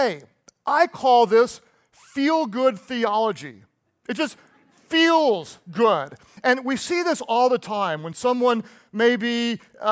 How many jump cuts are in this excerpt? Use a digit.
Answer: 0